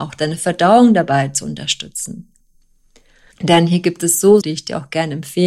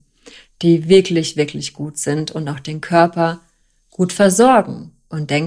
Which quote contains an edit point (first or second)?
first